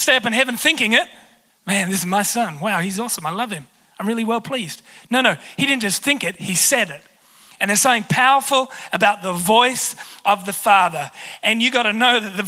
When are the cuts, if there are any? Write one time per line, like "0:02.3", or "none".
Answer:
0:01.5